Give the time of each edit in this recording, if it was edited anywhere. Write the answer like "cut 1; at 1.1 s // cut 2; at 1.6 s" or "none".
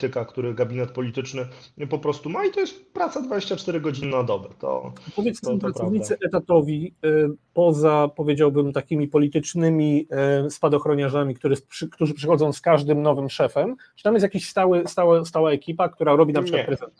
cut 1; at 5.4 s